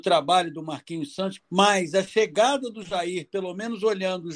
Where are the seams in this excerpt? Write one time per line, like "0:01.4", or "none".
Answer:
0:01.4